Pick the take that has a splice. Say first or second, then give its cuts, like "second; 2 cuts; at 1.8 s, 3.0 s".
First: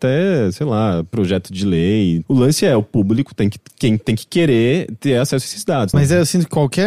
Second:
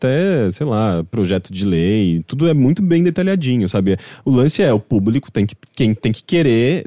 first; 2 cuts; at 2.2 s, 5.9 s